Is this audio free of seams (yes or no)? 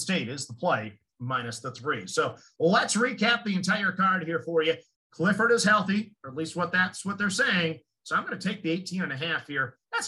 no